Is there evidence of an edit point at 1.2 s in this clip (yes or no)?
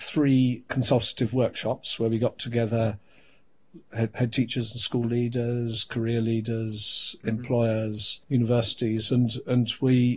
no